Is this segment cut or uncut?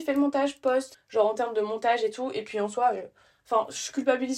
cut